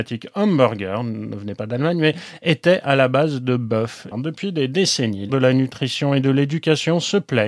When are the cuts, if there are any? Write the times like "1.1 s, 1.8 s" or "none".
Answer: 4.1 s, 5.3 s